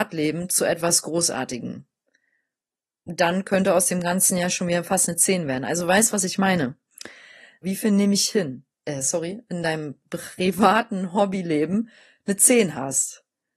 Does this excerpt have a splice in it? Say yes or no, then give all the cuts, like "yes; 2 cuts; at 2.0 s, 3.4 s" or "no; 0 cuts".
yes; 2 cuts; at 7.6 s, 8.8 s